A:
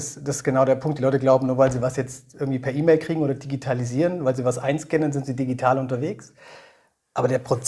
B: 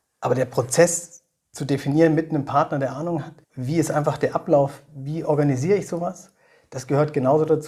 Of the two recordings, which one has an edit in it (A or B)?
B